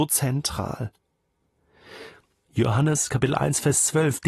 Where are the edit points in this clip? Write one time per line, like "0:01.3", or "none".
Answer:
0:02.4